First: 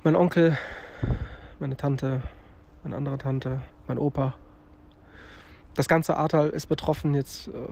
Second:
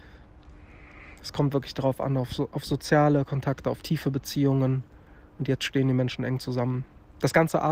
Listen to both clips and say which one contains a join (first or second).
first